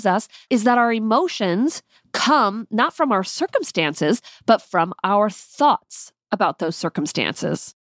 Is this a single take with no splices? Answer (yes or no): yes